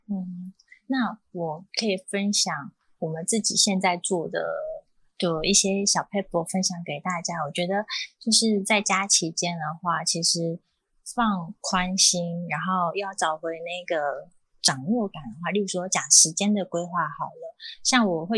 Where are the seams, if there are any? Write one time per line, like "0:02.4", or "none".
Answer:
none